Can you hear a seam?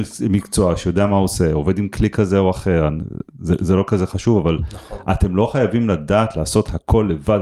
no; 0 cuts

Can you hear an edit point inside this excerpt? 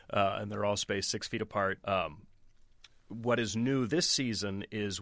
yes; 1 cut; at 1.8 s

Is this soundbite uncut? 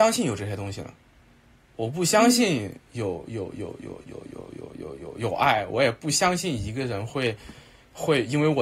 yes; 0 cuts

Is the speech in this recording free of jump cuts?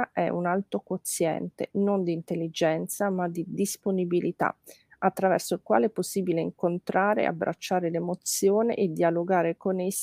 yes; 0 cuts

